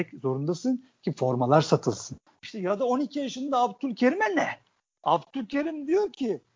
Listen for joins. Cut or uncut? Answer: cut